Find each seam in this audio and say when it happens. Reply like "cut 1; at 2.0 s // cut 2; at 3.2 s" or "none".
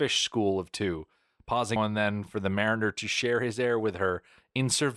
cut 1; at 1.8 s